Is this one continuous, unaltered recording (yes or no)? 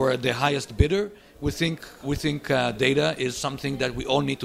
no